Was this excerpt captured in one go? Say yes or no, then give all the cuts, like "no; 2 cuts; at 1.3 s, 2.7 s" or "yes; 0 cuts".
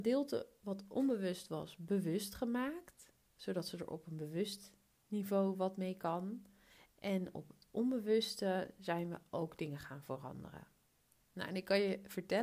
yes; 0 cuts